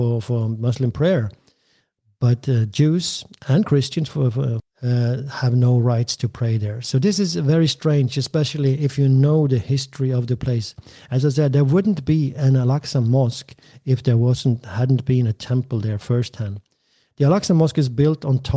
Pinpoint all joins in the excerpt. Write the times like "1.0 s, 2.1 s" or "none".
4.6 s

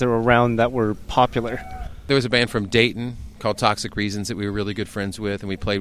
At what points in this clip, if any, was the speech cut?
none

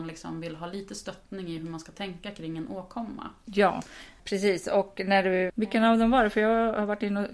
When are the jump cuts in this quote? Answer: 4.2 s, 5.5 s

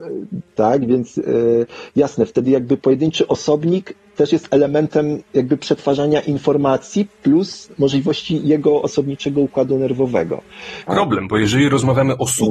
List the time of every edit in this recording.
5.3 s, 10.9 s

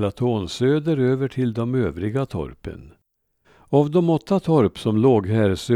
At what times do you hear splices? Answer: 3.4 s

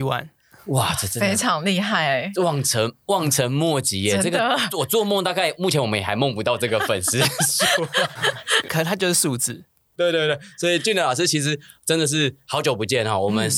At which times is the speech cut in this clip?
8.2 s, 10.0 s

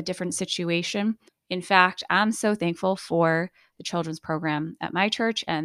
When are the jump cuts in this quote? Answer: 1.3 s

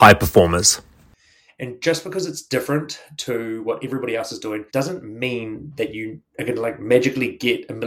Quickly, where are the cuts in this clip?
1.5 s, 4.7 s, 6.3 s

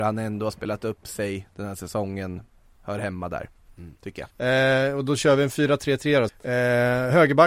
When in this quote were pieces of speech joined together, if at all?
4.3 s, 6.3 s

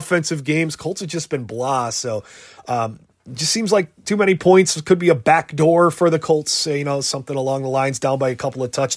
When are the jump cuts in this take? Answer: none

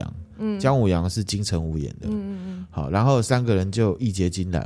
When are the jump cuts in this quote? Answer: none

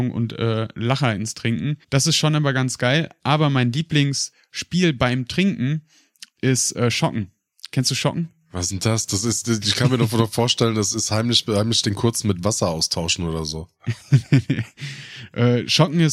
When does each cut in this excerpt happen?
1.8 s

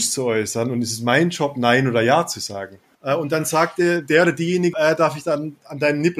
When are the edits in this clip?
2.9 s, 4.7 s

